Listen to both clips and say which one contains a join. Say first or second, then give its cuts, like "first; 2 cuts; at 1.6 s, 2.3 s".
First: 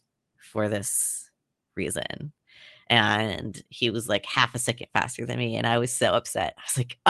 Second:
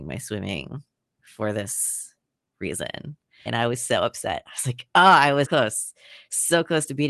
second; 2 cuts; at 3.5 s, 5.4 s